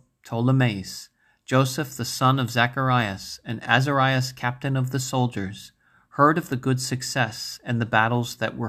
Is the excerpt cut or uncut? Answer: uncut